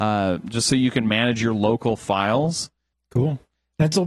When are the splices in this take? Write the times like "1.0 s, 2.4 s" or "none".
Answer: 2.9 s